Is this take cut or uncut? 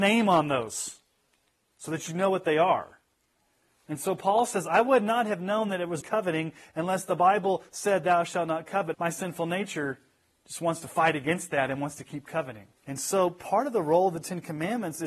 cut